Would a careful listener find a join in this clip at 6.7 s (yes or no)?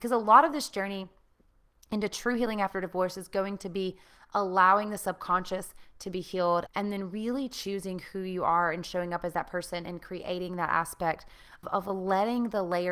yes